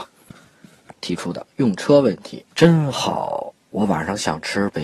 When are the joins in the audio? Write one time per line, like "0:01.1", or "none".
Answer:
0:00.9
0:02.5